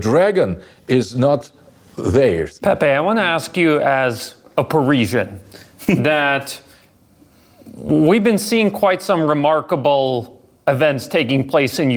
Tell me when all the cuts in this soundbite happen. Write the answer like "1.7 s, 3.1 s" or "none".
2.6 s